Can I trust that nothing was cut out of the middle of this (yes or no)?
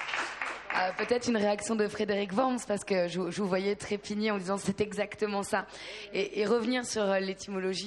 yes